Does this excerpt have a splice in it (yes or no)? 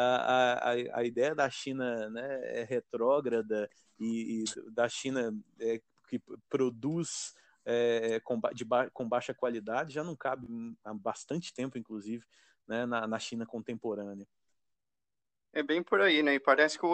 no